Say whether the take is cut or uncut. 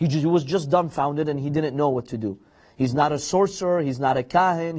uncut